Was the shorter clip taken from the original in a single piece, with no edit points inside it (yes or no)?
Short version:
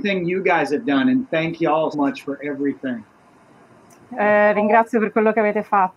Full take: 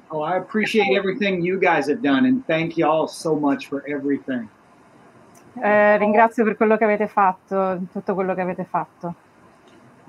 no